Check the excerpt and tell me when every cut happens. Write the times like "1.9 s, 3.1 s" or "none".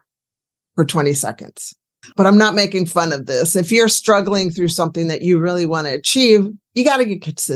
2.0 s